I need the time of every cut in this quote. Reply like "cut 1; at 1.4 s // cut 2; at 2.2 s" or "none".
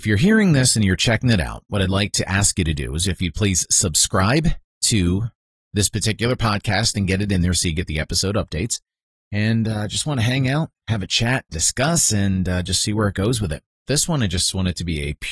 cut 1; at 9.1 s // cut 2; at 13.9 s